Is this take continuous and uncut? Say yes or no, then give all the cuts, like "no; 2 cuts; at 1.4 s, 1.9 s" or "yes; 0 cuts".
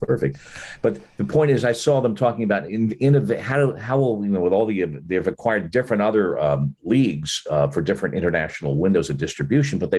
yes; 0 cuts